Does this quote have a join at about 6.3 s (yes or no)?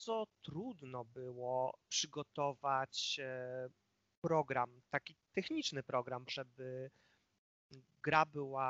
yes